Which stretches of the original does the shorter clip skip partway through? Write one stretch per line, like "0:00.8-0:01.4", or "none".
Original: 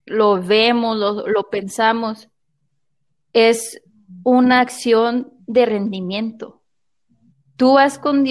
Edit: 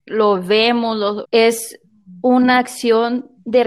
0:01.2-0:03.2